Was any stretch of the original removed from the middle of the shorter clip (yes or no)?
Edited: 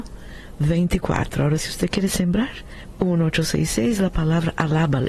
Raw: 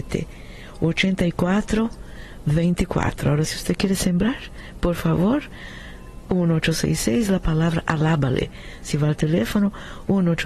yes